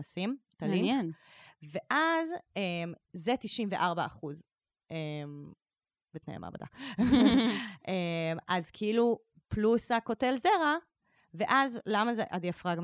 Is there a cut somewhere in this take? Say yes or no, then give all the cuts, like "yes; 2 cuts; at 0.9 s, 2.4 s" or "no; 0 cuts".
no; 0 cuts